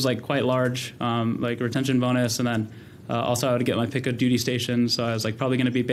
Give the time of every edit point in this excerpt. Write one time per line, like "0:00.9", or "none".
none

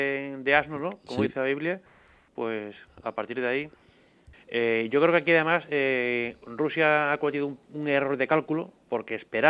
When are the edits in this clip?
0:04.3

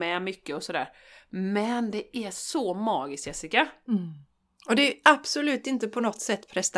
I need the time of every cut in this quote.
none

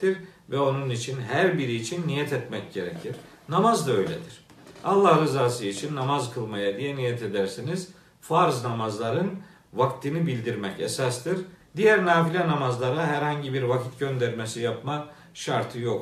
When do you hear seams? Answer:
0:11.6

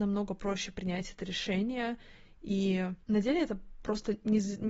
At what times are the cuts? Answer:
0:03.0

